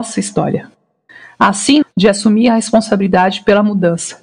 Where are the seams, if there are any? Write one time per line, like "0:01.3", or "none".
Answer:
0:01.8